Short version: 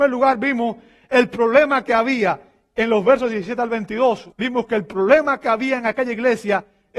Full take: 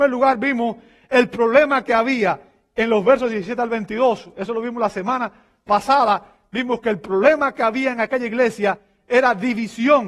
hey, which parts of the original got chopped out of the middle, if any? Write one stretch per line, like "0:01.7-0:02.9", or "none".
0:04.3-0:06.5